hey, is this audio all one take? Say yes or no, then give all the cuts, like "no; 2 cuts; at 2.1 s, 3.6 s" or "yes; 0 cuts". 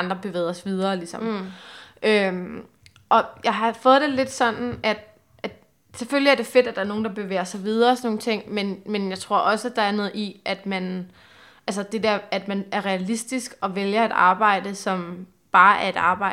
yes; 0 cuts